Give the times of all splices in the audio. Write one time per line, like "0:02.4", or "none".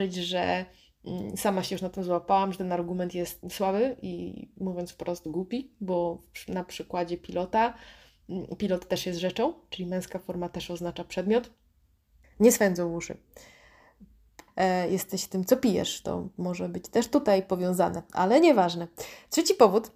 0:03.4
0:12.2
0:14.5